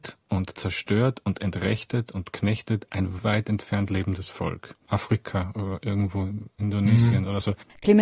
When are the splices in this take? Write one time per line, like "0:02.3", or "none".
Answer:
0:03.2